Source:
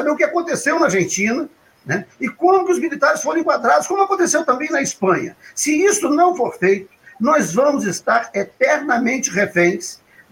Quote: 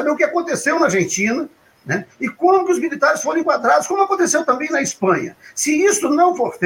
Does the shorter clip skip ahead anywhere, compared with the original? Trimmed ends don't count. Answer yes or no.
no